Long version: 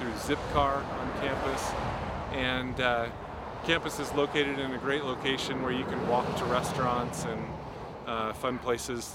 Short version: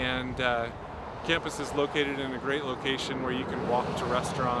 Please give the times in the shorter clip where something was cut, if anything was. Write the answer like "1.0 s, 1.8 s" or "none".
none